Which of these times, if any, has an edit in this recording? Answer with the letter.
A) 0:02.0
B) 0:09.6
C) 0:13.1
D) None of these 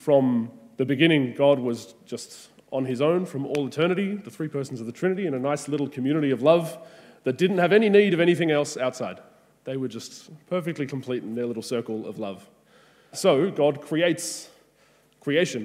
C